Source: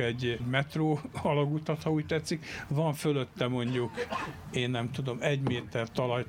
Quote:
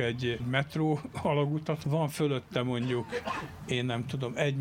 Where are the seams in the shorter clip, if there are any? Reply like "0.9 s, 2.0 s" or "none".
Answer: 1.8 s